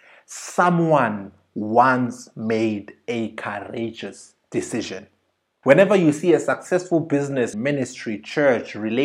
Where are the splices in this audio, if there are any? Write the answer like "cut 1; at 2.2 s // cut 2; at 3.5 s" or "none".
cut 1; at 5.6 s // cut 2; at 7.5 s